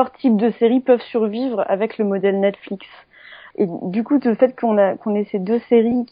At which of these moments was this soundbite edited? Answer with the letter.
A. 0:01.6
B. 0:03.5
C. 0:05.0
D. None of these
B